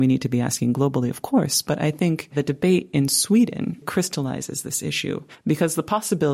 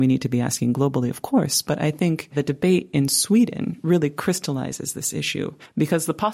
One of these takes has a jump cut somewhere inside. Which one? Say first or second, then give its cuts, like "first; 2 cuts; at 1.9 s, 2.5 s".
first; 1 cut; at 3.8 s